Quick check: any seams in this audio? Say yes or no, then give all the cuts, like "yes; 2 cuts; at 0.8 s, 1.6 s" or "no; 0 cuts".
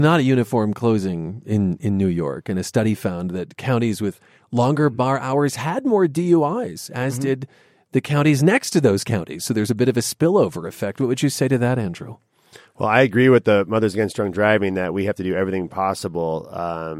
no; 0 cuts